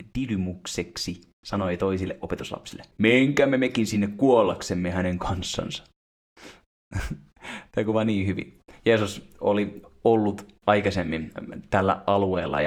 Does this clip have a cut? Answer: yes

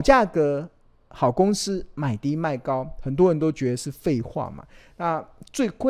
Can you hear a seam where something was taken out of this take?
no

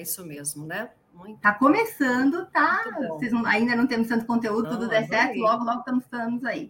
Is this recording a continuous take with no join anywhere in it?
no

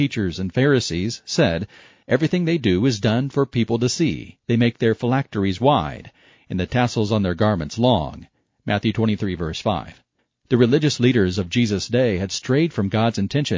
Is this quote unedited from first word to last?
yes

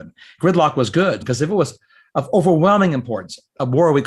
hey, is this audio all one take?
no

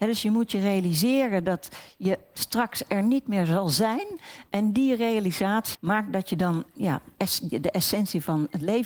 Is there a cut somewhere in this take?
yes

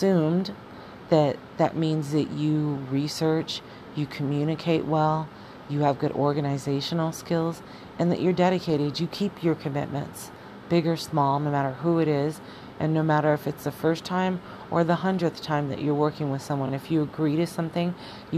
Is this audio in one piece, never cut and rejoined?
yes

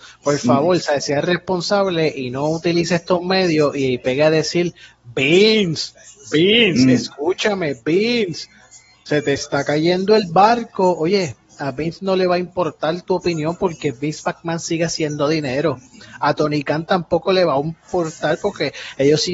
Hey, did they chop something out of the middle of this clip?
no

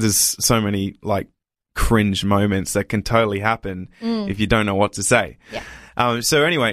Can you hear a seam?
no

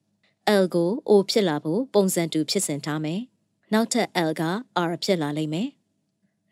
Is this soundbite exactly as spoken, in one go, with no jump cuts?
yes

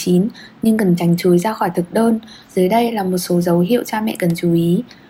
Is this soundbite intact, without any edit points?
no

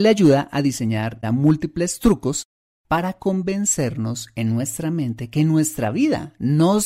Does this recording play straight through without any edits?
no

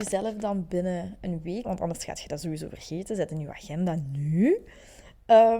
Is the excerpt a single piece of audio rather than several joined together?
no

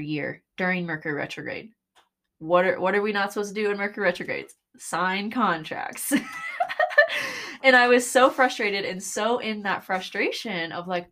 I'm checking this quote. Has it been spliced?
no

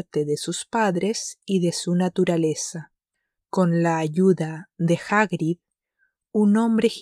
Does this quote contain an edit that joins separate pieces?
yes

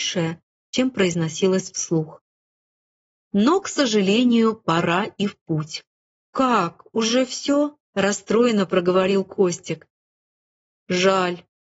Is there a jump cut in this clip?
yes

